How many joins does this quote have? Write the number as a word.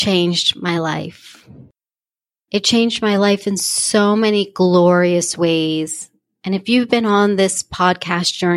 zero